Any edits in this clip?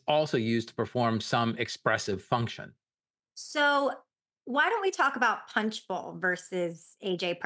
no; 0 cuts

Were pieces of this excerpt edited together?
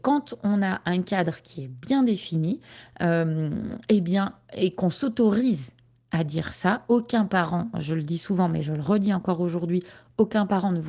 no; 0 cuts

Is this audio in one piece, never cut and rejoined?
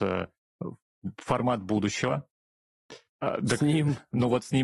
no; 1 cut; at 3.1 s

